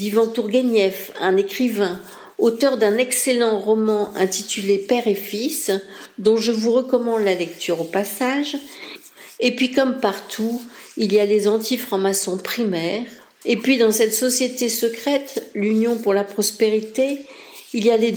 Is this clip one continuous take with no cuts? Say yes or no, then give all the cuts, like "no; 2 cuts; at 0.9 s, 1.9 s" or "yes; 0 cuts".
no; 2 cuts; at 9.4 s, 13.4 s